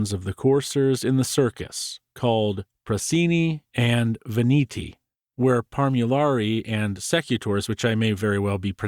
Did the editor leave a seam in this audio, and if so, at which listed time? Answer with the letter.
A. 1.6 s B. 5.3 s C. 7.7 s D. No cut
B